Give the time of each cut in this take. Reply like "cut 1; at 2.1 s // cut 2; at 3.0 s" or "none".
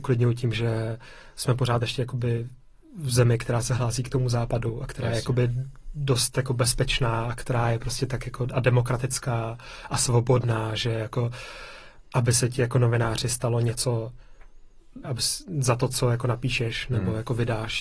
cut 1; at 15.0 s